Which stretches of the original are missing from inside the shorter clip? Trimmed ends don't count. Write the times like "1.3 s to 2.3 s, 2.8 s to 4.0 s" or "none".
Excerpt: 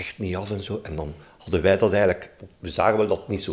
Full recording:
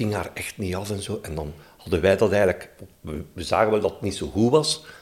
3.0 s to 3.3 s

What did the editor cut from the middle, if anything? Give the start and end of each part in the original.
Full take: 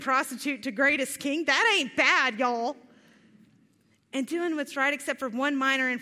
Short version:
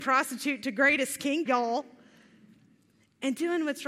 1.5 s to 2.4 s

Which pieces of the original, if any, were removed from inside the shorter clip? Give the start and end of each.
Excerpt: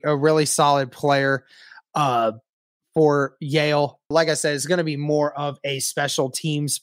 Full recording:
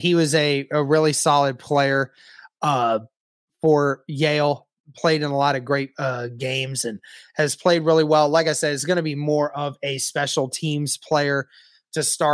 4.8 s to 8.3 s

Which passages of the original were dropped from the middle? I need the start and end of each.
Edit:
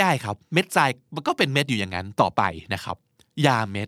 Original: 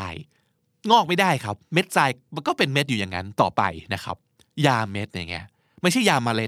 none

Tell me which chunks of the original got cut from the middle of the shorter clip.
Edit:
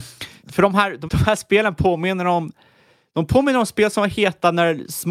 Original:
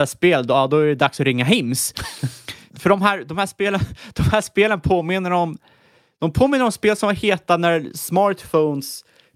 3.3 s to 4.1 s

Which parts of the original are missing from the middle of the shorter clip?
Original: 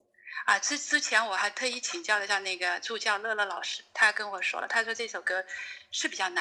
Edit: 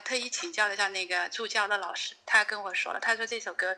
3.2 s to 3.4 s

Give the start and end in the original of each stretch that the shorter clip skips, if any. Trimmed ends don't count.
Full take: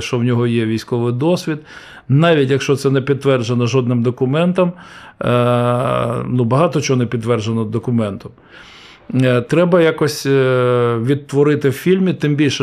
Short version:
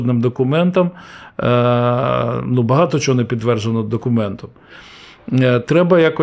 none

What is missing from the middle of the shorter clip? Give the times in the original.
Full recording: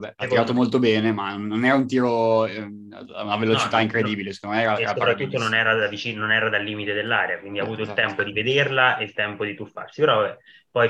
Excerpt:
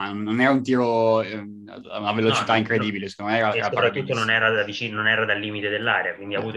none

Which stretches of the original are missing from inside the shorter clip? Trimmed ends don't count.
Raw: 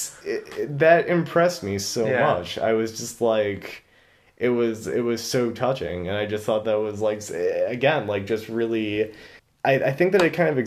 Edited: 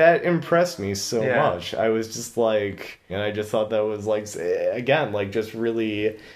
3.9 s to 6.0 s

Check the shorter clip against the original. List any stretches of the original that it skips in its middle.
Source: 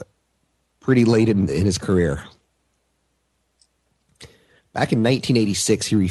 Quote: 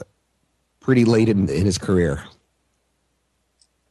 none

